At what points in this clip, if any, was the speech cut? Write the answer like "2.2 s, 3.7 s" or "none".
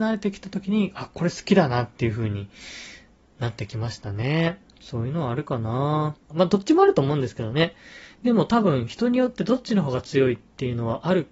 4.7 s, 6.3 s